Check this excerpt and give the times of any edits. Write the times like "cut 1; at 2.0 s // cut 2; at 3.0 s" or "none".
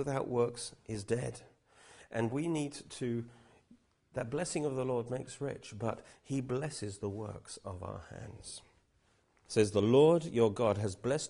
cut 1; at 9.5 s